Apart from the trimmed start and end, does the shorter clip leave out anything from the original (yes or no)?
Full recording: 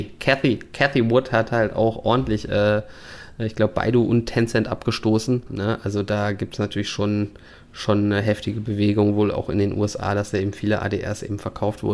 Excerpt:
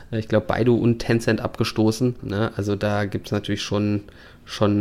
no